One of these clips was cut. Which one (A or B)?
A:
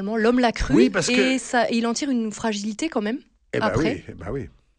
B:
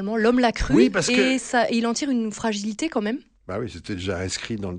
B